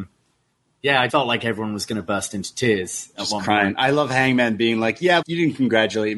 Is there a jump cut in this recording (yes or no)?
yes